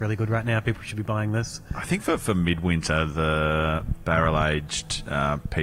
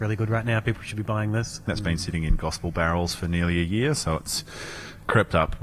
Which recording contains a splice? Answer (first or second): second